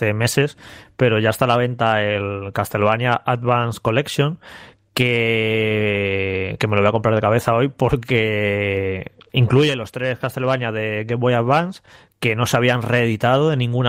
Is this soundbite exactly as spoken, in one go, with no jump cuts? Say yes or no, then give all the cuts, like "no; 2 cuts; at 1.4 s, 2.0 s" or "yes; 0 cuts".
yes; 0 cuts